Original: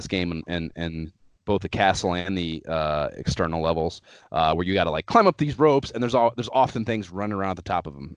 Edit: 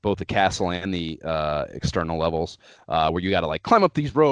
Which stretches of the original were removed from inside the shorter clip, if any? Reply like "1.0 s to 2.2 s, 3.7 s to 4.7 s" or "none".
none